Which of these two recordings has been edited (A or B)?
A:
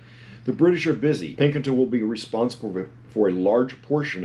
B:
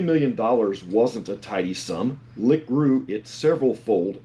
A